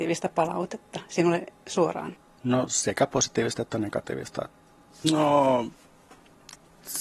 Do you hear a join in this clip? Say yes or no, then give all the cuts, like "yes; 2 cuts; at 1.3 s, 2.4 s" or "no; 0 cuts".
yes; 2 cuts; at 2.4 s, 5.0 s